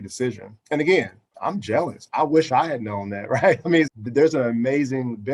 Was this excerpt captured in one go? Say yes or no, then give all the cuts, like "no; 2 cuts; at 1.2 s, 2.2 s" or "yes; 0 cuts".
no; 2 cuts; at 1.3 s, 3.9 s